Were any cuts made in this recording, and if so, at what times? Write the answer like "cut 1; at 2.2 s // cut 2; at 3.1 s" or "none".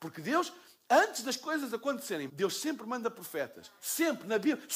cut 1; at 2.3 s